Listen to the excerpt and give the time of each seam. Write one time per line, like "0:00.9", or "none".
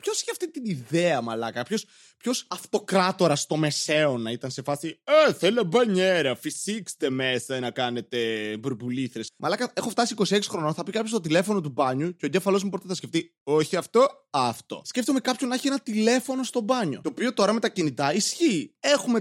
0:09.3